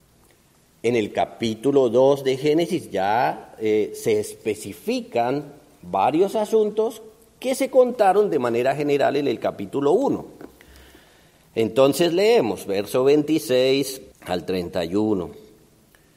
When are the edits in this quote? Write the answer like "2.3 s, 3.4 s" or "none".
14.1 s